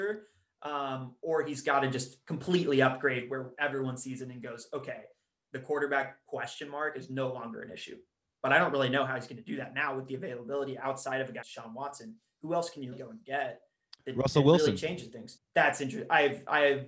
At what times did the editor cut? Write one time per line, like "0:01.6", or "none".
0:11.4
0:12.9